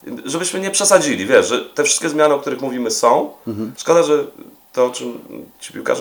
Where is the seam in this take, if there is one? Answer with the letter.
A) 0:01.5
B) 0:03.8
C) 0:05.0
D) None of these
B